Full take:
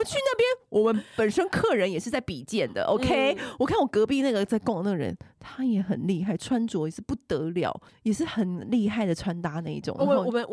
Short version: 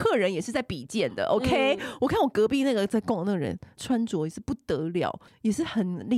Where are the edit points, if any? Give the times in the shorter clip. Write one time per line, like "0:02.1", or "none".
0:03.8